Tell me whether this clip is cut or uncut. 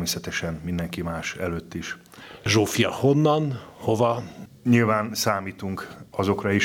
cut